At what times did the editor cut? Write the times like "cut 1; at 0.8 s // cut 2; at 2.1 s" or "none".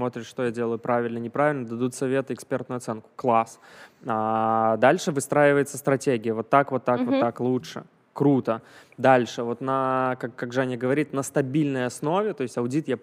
none

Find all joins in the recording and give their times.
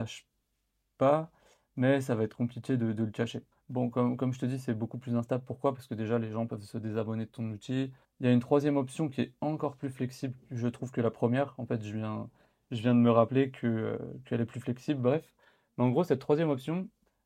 cut 1; at 3.5 s // cut 2; at 8.0 s

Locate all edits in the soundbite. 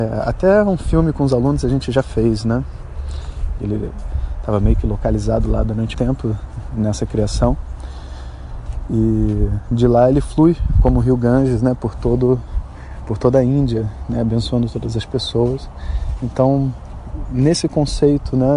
cut 1; at 3.6 s // cut 2; at 5.9 s

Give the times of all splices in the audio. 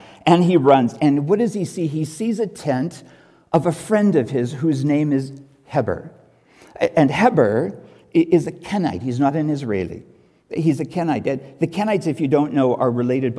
none

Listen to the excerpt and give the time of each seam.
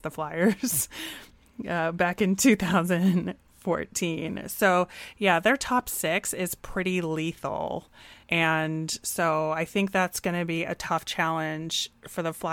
cut 1; at 8.2 s

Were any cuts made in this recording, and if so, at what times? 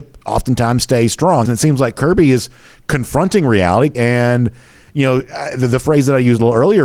cut 1; at 1.5 s // cut 2; at 3.9 s

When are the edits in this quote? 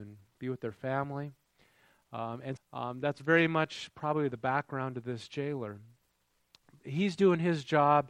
cut 1; at 2.6 s

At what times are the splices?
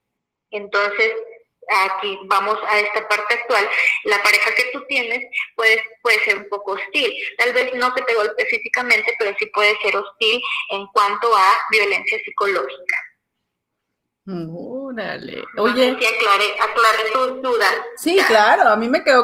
none

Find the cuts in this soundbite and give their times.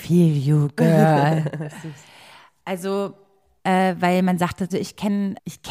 cut 1; at 3.6 s // cut 2; at 4.7 s

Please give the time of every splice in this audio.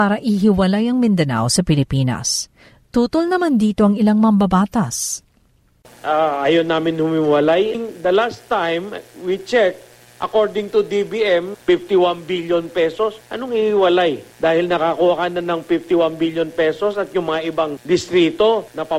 cut 1; at 11.5 s

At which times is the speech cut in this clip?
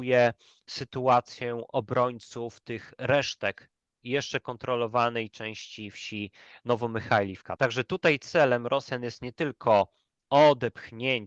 cut 1; at 7.6 s

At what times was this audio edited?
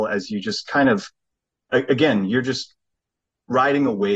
none

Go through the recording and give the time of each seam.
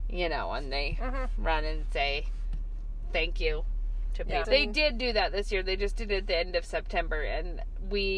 cut 1; at 4.4 s

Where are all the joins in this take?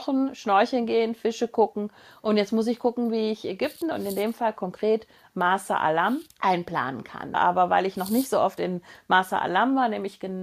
cut 1; at 6.3 s // cut 2; at 7.3 s

